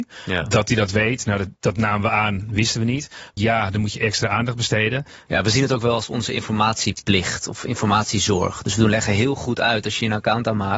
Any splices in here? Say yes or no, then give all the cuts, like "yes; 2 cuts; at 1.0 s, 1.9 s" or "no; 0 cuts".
yes; 2 cuts; at 3.4 s, 5.3 s